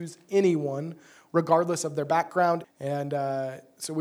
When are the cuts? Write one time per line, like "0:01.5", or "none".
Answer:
0:02.6